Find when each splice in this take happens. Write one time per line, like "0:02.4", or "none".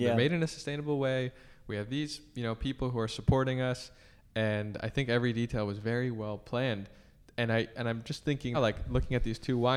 0:08.5